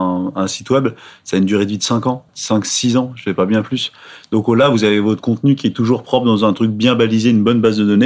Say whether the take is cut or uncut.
cut